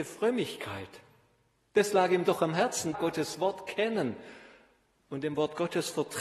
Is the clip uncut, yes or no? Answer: no